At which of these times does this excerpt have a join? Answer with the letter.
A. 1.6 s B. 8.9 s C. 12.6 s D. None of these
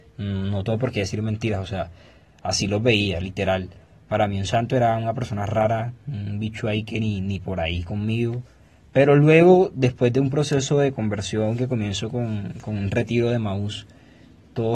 D